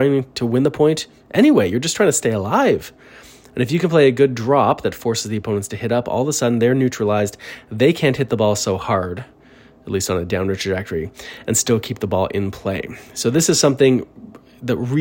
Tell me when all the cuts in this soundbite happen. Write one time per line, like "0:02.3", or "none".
none